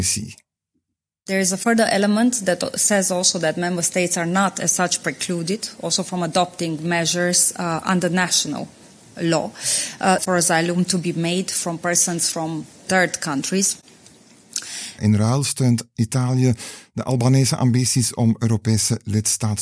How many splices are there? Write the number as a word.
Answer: two